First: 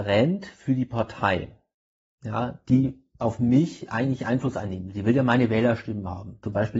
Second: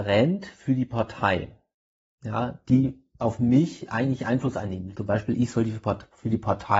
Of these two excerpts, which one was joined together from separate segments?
second; 1 cut; at 4.9 s

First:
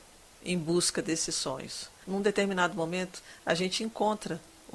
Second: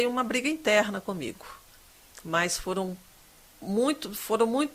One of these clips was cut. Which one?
first; 1 cut; at 2.0 s

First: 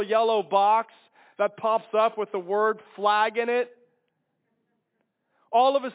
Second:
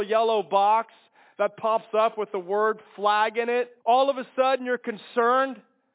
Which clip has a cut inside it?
second; 1 cut; at 3.8 s

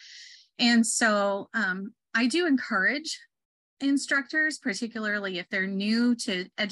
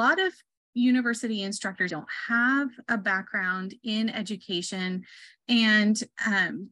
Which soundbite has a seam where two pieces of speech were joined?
second; 1 cut; at 1.9 s

